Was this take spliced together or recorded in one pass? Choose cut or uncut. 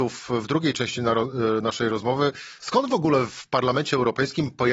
cut